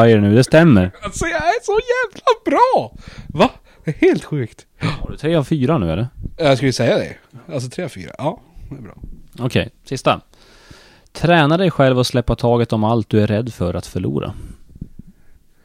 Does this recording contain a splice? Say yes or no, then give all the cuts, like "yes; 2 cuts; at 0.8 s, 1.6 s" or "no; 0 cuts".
no; 0 cuts